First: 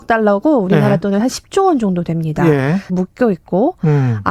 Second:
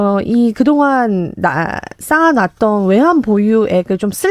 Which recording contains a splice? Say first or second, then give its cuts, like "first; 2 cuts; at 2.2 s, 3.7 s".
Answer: first; 1 cut; at 2.9 s